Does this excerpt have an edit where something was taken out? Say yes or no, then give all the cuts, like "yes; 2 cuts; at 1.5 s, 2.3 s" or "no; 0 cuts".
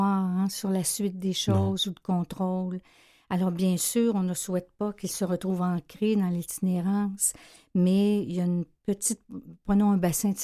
no; 0 cuts